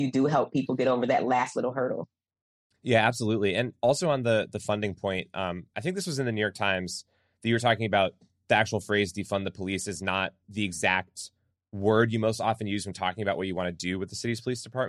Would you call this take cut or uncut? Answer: uncut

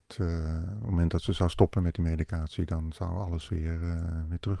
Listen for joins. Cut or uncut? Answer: uncut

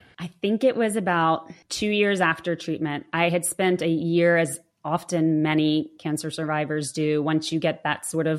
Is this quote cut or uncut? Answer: cut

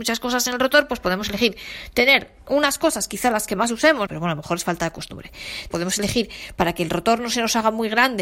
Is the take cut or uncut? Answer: cut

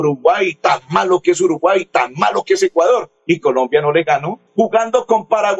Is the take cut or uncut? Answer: cut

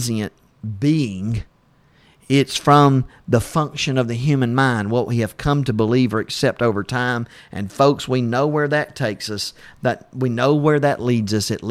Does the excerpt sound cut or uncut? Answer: uncut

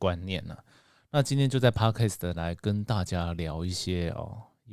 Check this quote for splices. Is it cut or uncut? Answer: cut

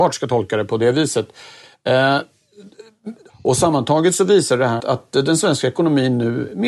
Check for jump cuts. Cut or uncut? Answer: cut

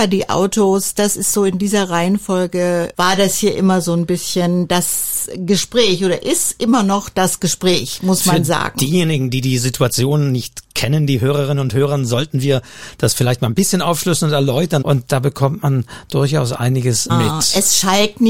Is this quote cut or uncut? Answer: cut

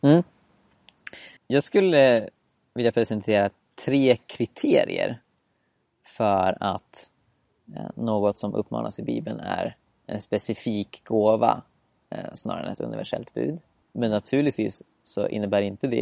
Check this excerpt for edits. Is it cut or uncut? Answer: cut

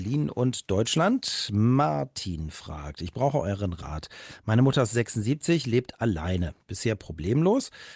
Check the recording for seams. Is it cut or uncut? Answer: uncut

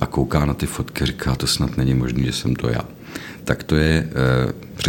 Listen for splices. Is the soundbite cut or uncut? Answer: uncut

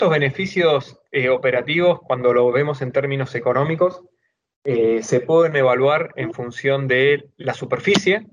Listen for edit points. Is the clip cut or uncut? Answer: uncut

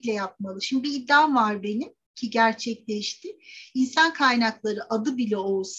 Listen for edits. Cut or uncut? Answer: uncut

